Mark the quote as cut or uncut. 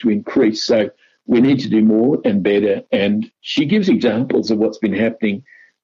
uncut